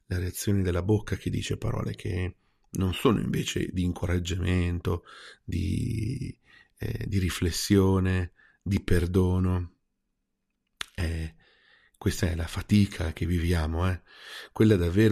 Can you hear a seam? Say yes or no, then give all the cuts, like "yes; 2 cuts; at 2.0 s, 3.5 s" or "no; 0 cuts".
no; 0 cuts